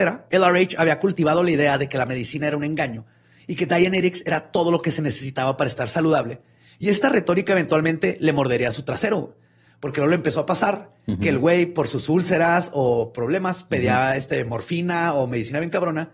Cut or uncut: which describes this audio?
uncut